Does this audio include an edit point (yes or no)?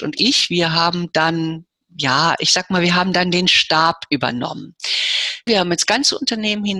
yes